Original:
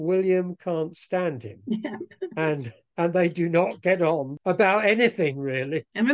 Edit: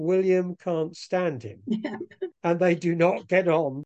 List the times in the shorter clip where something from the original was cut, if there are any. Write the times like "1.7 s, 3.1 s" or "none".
2.3 s